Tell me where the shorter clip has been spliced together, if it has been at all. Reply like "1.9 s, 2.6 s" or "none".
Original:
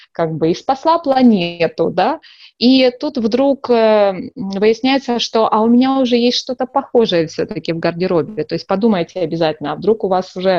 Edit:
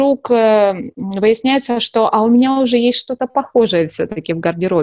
none

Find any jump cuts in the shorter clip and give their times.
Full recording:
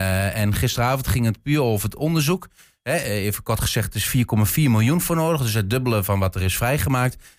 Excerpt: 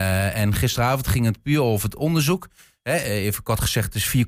none

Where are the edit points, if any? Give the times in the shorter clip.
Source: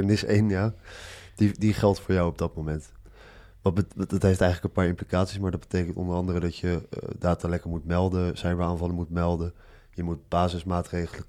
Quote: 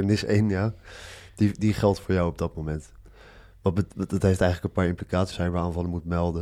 5.3 s

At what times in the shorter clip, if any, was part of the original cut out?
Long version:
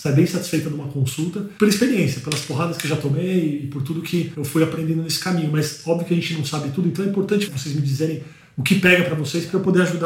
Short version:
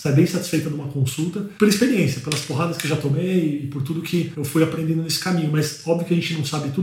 none

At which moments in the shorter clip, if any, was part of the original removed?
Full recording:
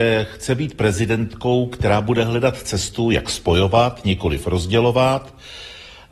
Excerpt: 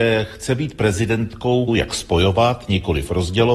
1.7 s

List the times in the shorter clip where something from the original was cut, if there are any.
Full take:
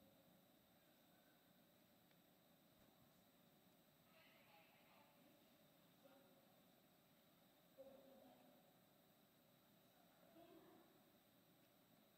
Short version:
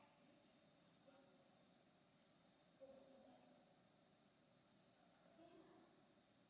none

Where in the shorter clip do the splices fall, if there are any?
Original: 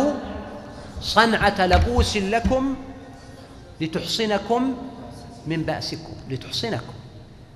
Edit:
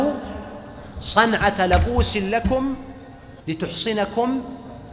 3.4 s

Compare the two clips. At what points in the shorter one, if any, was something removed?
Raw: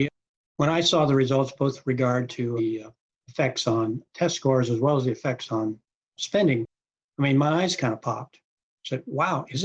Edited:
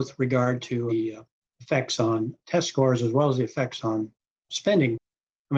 none

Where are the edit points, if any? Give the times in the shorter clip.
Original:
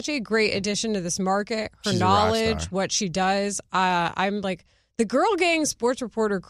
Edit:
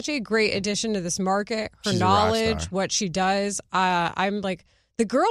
none

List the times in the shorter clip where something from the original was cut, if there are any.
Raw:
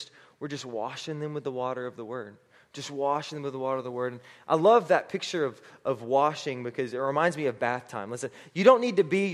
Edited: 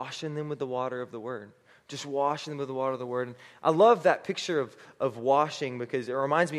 none

